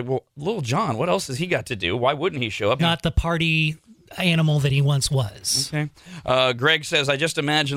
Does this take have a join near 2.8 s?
yes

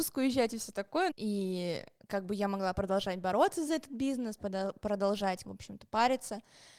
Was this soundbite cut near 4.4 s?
yes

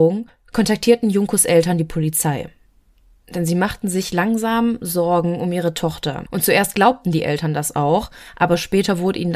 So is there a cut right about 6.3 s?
yes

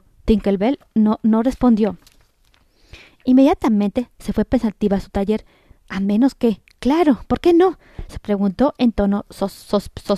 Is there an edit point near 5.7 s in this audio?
yes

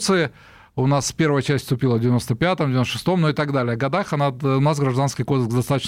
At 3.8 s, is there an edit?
no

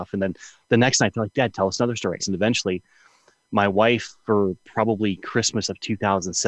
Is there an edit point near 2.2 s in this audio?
yes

